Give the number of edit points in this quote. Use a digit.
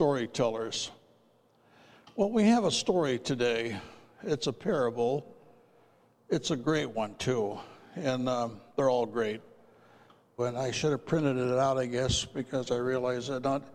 1